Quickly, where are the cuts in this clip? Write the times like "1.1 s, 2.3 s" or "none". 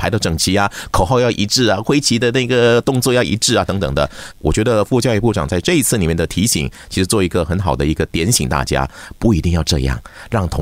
4.3 s